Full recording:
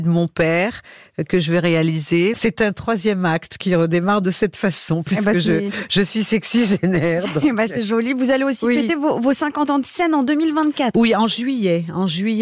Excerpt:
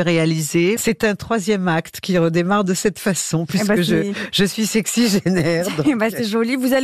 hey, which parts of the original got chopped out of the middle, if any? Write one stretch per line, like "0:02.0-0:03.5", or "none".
none

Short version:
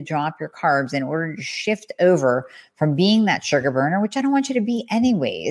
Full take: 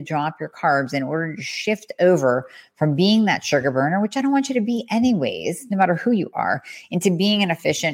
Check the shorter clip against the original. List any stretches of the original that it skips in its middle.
none

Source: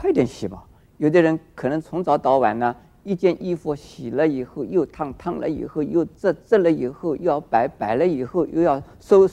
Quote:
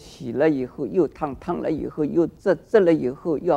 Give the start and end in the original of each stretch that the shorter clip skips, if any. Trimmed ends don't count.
none

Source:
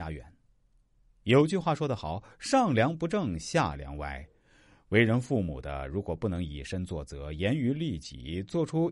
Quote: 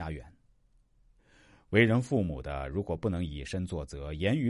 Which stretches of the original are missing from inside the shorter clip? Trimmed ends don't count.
0:01.2-0:04.4

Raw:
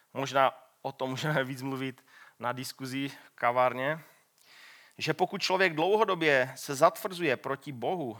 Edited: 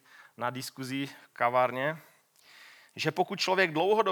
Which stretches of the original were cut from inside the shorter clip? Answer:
none

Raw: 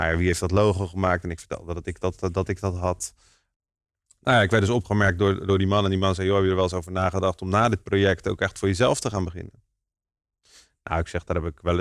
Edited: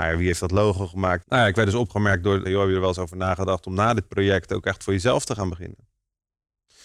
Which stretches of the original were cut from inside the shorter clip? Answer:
0:01.2-0:04.2
0:05.4-0:06.2

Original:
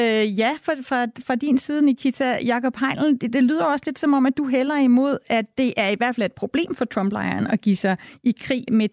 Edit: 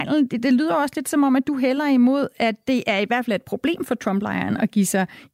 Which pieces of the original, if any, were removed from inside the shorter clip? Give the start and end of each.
none

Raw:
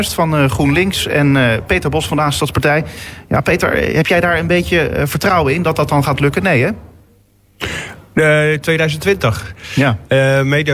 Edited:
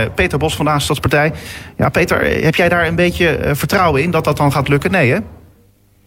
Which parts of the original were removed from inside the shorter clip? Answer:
none

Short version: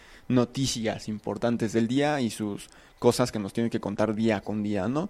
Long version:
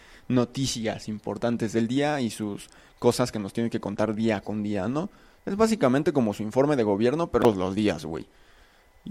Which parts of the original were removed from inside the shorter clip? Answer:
none

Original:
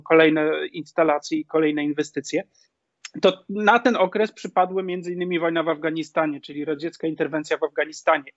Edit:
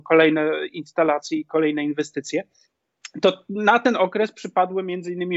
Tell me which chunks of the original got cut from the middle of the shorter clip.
none

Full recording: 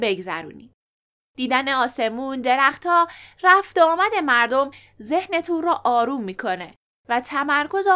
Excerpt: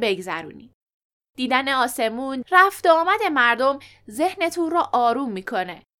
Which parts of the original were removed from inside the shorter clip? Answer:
0:02.4-0:03.3

